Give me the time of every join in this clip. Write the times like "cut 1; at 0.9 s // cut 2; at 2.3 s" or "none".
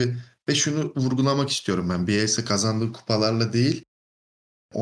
none